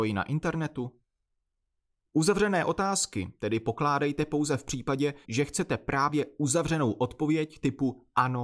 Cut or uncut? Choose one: cut